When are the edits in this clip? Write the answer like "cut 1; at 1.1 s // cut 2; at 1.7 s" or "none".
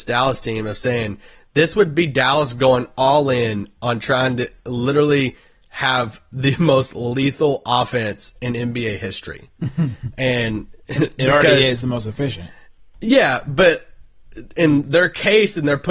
none